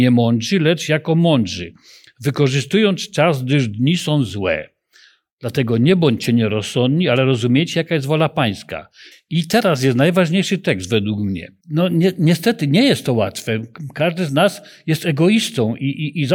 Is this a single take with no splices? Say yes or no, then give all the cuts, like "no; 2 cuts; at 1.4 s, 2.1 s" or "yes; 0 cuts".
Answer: no; 2 cuts; at 9.1 s, 11.6 s